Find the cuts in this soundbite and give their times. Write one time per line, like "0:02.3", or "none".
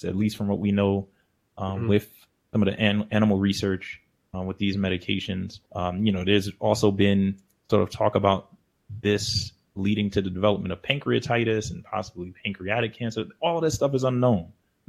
0:05.7